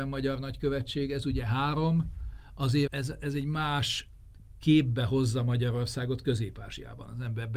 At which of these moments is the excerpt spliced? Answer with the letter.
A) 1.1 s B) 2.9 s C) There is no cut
B